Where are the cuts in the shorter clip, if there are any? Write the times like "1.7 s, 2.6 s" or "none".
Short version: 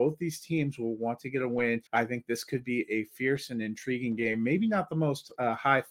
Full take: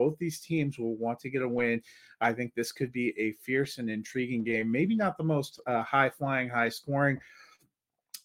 1.9 s